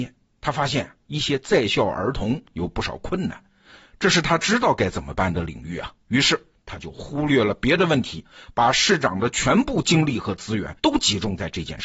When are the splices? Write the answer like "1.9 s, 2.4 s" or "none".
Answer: 10.8 s